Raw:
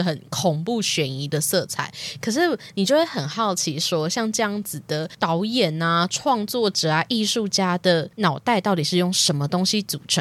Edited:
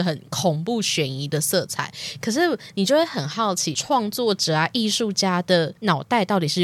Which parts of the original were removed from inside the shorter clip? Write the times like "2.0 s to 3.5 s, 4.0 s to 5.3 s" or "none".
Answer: 3.7 s to 6.1 s